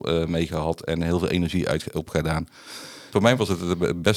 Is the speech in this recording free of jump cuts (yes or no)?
no